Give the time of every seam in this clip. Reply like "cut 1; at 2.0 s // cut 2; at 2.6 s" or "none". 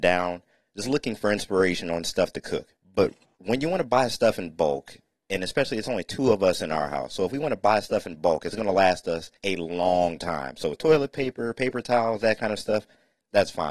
cut 1; at 9.4 s

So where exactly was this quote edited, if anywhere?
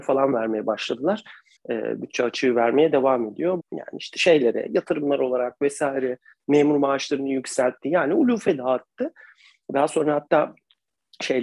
cut 1; at 1.6 s // cut 2; at 3.6 s

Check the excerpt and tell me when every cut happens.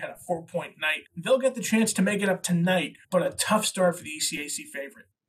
cut 1; at 1.1 s // cut 2; at 3.0 s

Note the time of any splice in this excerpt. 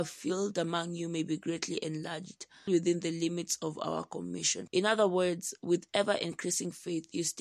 cut 1; at 2.7 s // cut 2; at 4.7 s

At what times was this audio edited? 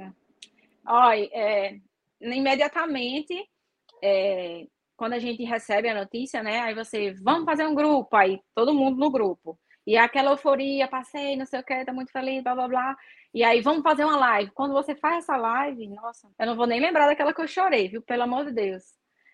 cut 1; at 16.3 s

